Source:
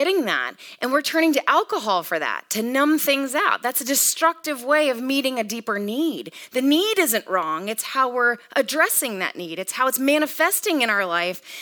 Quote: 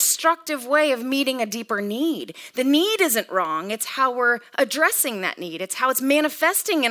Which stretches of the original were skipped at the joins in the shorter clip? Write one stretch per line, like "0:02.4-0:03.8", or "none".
none